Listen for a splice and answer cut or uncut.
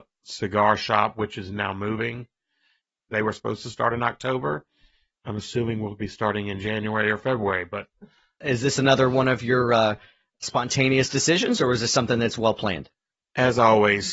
uncut